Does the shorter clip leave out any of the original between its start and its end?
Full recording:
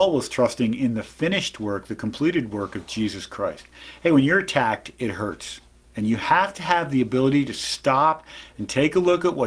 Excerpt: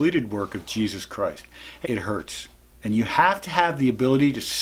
yes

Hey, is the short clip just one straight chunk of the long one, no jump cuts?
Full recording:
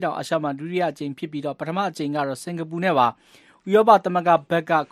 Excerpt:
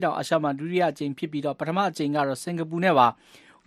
yes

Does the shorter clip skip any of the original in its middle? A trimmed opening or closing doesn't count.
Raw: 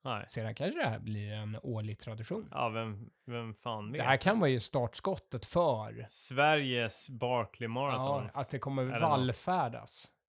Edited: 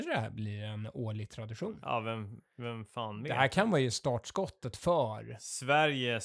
no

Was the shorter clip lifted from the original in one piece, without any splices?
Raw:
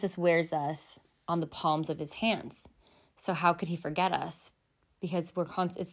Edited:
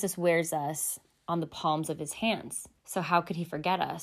no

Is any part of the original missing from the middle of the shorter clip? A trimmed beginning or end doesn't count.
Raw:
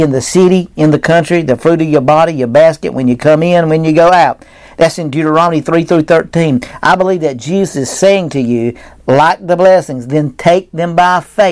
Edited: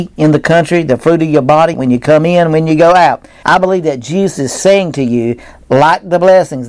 yes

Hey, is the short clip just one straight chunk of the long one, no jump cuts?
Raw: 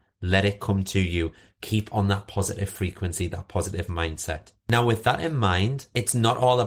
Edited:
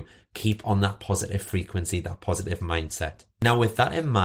yes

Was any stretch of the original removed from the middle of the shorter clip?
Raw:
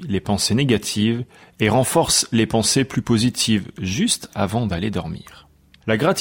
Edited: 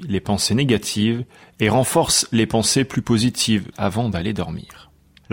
yes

